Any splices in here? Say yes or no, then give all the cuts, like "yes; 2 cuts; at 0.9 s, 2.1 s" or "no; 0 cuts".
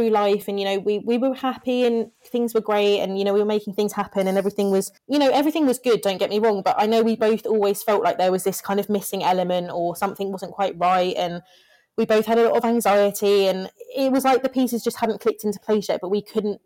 yes; 1 cut; at 5.0 s